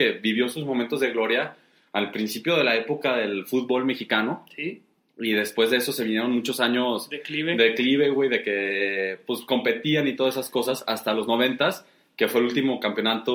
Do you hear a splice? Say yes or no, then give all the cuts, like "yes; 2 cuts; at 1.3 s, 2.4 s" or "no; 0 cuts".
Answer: no; 0 cuts